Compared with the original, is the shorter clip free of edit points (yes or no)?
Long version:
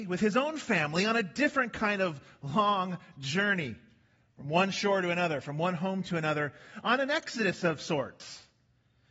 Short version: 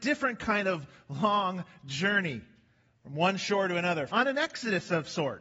no